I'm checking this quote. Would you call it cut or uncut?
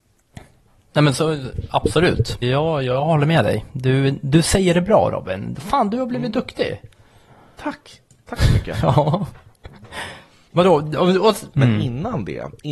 cut